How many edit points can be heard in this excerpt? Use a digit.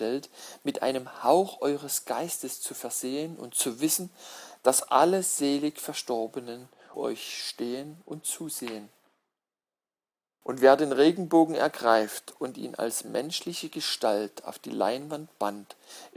2